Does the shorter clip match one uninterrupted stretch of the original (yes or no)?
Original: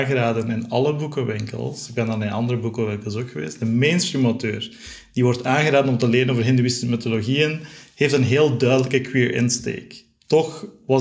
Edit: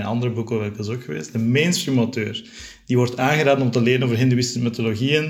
yes